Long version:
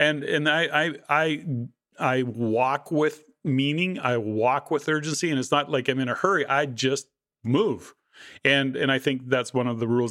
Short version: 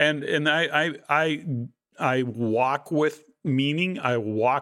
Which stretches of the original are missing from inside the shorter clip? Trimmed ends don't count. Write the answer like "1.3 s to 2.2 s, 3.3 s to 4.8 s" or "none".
none